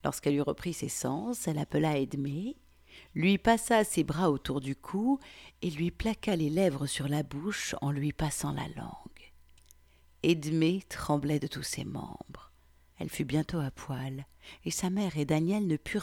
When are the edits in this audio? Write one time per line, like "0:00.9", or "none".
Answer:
0:12.9